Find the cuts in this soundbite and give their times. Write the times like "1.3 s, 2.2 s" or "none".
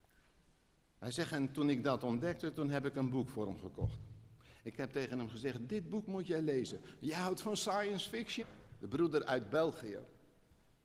8.4 s